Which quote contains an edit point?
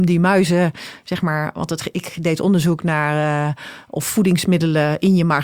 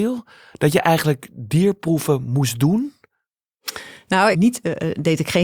second; 1 cut; at 4.3 s

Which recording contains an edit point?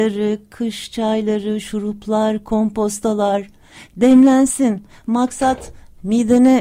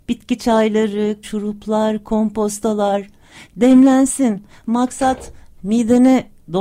second; 1 cut; at 1.2 s

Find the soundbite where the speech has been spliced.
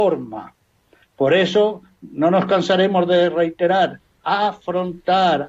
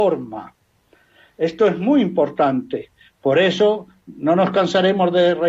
first; 2 cuts; at 1.0 s, 4.2 s

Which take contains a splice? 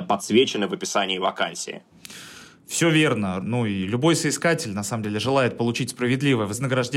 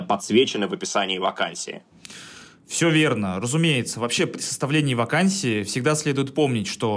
first; 1 cut; at 3.4 s

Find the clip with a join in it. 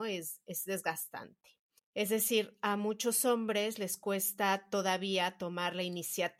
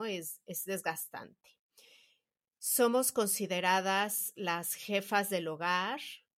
first; 1 cut; at 1.8 s

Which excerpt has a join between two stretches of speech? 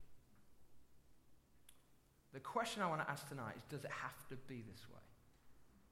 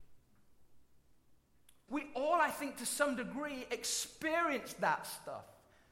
second; 1 cut; at 1.9 s

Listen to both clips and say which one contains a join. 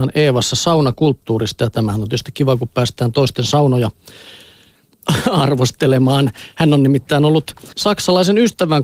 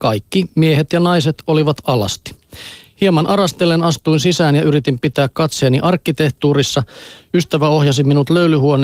first; 1 cut; at 7.7 s

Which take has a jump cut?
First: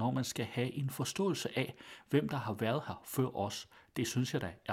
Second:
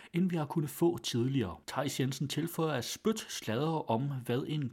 second; 1 cut; at 1.6 s

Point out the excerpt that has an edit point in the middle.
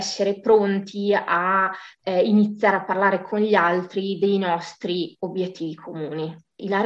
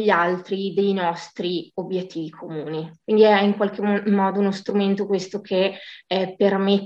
second; 1 cut; at 3.0 s

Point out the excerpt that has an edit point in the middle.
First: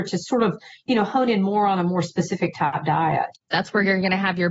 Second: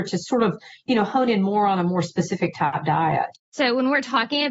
first; 1 cut; at 3.4 s

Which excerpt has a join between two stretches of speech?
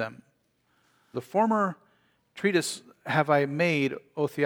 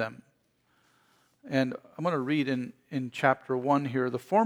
first; 1 cut; at 1.1 s

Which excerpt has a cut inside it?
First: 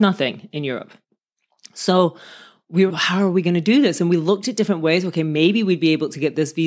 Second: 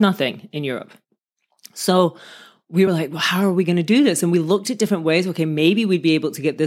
first; 1 cut; at 2.9 s

